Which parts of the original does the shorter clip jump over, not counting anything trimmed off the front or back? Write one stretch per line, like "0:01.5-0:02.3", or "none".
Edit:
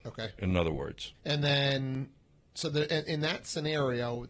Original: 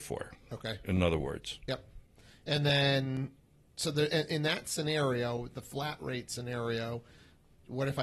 0:01.6-0:02.4